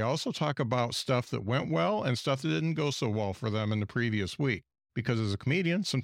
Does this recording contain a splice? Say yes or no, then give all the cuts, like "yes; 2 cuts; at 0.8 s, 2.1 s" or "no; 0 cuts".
no; 0 cuts